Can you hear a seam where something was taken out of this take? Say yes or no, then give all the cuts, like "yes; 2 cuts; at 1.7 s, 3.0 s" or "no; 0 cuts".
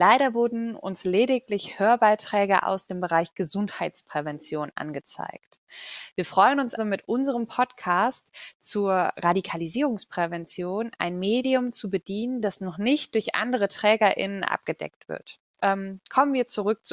yes; 2 cuts; at 6.8 s, 15.5 s